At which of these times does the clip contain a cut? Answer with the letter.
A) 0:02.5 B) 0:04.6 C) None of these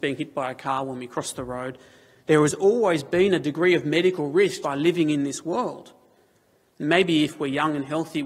B